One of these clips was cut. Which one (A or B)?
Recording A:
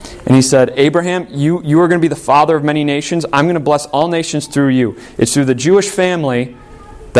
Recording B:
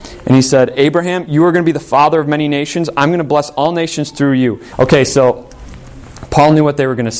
B